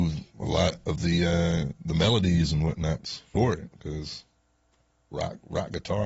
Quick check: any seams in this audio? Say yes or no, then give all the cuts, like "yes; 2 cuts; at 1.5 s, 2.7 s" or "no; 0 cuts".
no; 0 cuts